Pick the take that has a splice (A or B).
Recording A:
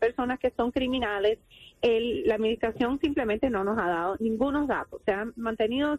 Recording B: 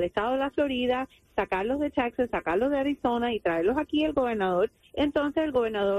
B